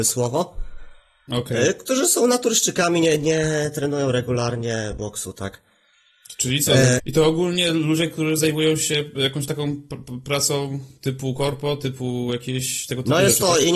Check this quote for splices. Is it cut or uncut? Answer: cut